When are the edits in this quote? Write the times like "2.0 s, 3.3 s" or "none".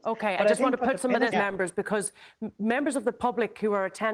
1.3 s